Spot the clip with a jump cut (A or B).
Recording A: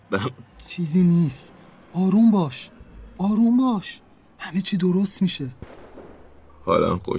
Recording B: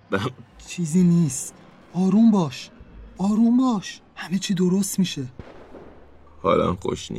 B